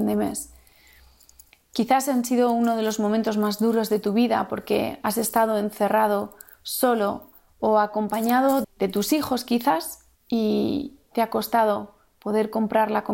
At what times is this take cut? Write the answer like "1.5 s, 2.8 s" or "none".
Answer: 8.6 s, 10.1 s

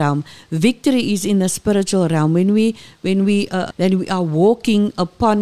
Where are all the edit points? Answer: 3.7 s

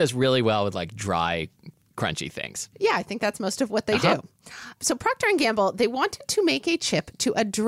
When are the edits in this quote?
none

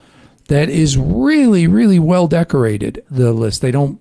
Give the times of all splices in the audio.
3.0 s

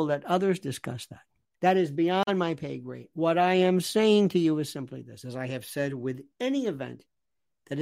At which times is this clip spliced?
1.4 s

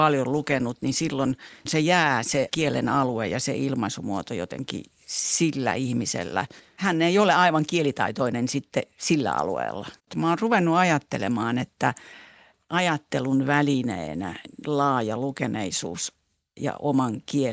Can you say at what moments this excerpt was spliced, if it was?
none

